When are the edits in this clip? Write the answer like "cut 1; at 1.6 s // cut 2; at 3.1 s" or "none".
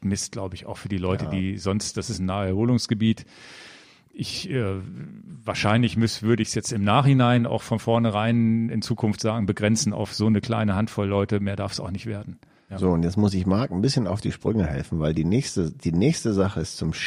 none

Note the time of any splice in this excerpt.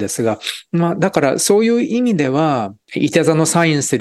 cut 1; at 2.8 s

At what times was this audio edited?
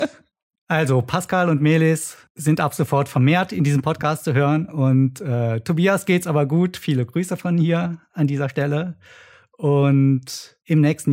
none

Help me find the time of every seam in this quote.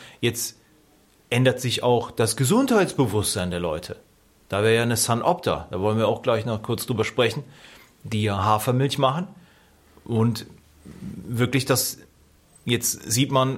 none

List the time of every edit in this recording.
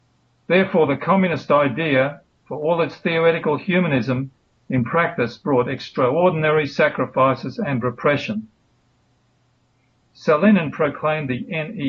cut 1; at 10.0 s

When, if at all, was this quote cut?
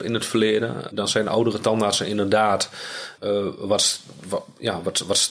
cut 1; at 0.9 s // cut 2; at 3.2 s

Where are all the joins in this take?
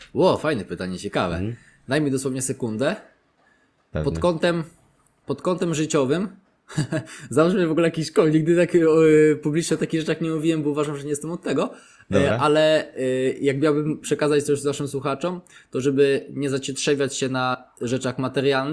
none

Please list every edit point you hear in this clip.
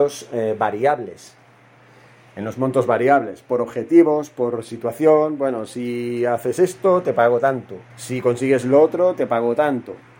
cut 1; at 7.9 s

